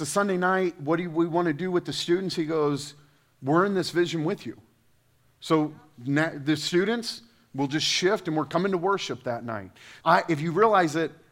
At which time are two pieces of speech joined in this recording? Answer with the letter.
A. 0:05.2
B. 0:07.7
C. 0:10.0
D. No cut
C